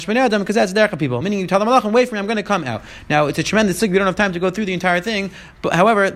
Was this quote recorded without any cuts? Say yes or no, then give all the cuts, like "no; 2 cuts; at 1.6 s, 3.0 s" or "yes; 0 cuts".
yes; 0 cuts